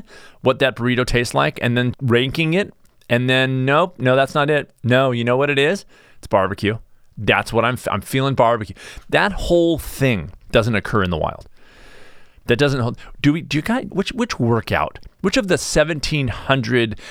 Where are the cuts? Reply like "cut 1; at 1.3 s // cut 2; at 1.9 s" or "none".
cut 1; at 1.9 s // cut 2; at 13.9 s